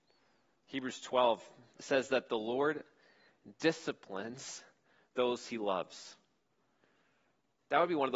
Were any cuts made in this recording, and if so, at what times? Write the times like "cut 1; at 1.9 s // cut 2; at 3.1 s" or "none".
cut 1; at 1.8 s